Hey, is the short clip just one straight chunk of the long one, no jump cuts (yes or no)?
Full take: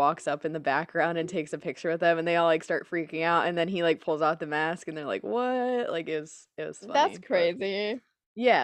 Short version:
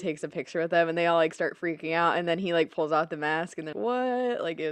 no